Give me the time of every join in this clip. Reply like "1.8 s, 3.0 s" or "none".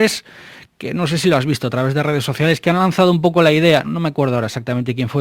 3.8 s